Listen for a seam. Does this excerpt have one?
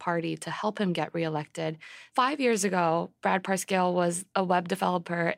yes; 1 cut; at 2.1 s

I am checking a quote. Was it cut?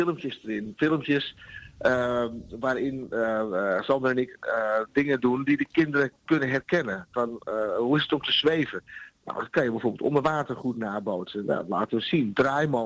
no; 0 cuts

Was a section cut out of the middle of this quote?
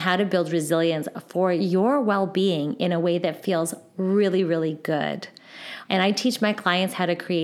yes; 1 cut; at 5.8 s

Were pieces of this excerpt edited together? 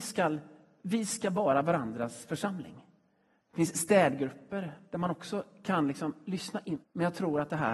yes; 2 cuts; at 3.4 s, 6.8 s

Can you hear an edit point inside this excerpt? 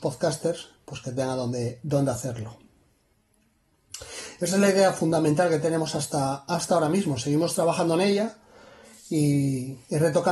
no; 0 cuts

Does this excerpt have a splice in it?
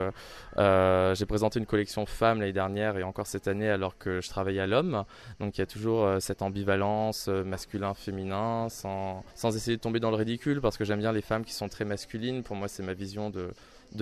yes; 1 cut; at 9.3 s

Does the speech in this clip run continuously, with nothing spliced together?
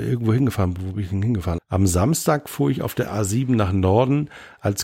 no; 1 cut; at 1.6 s

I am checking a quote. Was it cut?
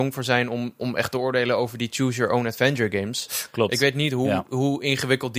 no; 0 cuts

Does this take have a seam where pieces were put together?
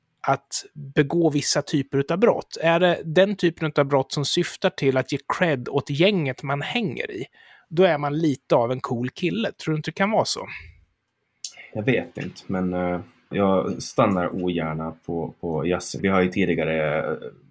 yes; 2 cuts; at 13.3 s, 16.0 s

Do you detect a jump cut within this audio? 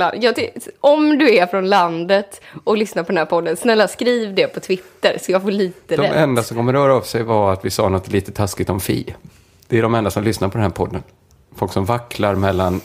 no; 0 cuts

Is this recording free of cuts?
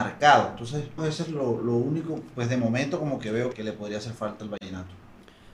no; 2 cuts; at 1.0 s, 3.5 s

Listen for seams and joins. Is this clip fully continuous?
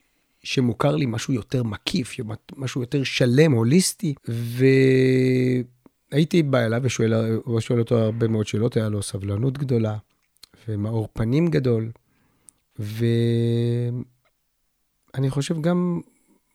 yes; 0 cuts

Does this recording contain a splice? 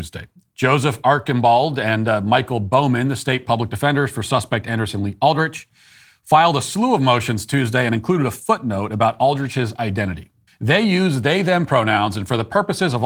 yes; 1 cut; at 10.5 s

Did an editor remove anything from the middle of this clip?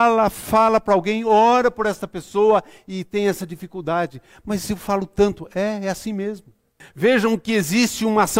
yes; 1 cut; at 6.8 s

